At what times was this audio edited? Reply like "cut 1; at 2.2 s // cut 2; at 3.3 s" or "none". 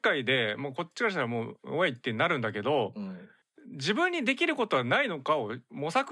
none